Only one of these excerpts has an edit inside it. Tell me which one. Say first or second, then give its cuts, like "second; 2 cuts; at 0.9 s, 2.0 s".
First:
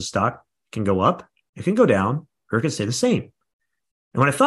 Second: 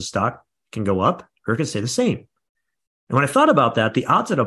second; 1 cut; at 1.4 s